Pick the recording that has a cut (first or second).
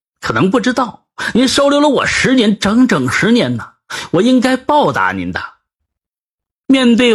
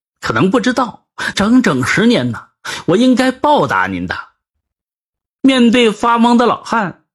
second